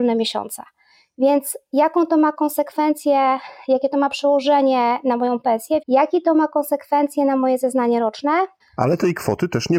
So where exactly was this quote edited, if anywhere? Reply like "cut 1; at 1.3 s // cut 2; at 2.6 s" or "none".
cut 1; at 5.8 s // cut 2; at 8.6 s